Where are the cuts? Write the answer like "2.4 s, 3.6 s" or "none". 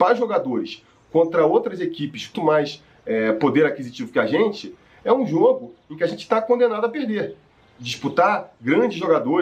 2.3 s